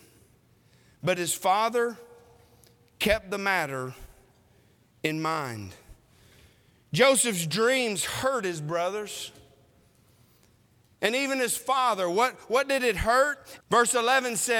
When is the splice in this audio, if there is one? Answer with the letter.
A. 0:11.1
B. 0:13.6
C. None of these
B